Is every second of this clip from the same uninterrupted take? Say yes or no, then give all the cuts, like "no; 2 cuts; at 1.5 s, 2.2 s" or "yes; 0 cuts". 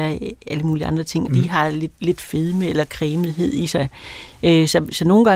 no; 1 cut; at 1.3 s